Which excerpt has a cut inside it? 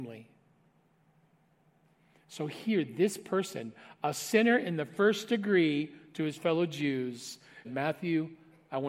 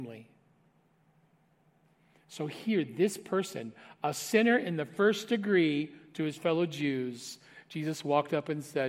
first; 1 cut; at 7.6 s

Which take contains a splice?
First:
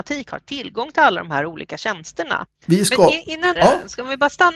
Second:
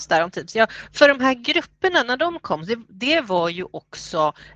first; 2 cuts; at 2.5 s, 3.5 s

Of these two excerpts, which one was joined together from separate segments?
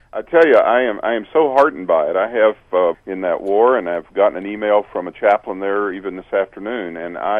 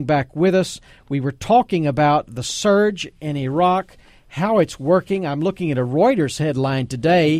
first; 1 cut; at 2.9 s

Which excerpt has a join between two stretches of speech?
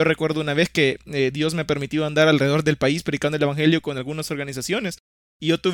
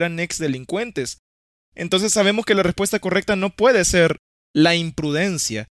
second; 1 cut; at 1.6 s

